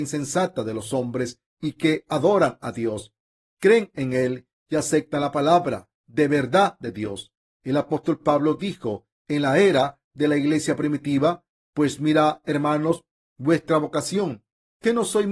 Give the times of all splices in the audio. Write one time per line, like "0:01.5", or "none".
none